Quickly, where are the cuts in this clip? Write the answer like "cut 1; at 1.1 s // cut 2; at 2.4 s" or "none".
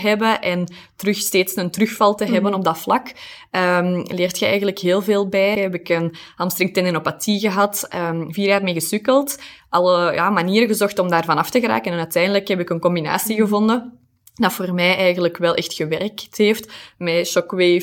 cut 1; at 5.6 s